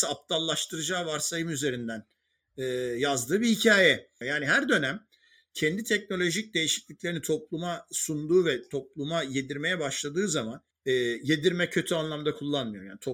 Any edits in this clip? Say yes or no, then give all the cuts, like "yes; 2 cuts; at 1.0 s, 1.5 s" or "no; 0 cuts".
yes; 1 cut; at 4.2 s